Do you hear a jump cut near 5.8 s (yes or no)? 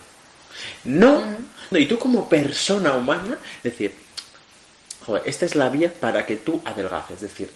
no